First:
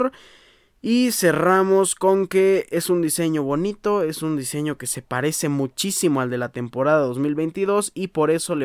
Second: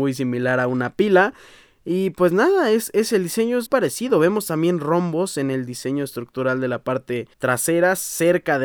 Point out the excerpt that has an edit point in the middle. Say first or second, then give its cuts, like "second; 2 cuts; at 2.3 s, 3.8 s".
second; 2 cuts; at 3.7 s, 7.3 s